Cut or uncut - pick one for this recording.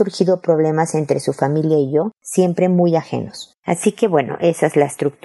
cut